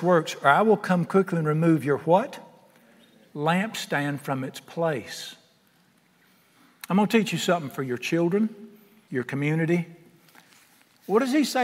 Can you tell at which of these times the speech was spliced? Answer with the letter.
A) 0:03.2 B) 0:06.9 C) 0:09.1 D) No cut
C